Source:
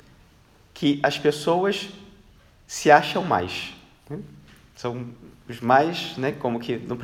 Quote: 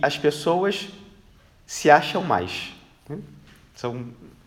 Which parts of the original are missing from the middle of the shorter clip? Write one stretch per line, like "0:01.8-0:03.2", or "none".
none